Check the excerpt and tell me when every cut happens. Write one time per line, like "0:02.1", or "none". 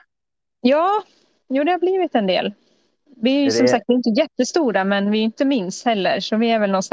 none